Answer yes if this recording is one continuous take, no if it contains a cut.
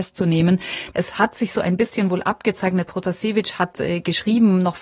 no